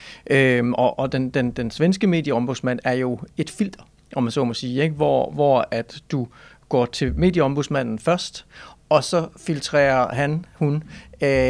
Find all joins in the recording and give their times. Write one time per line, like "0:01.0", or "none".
none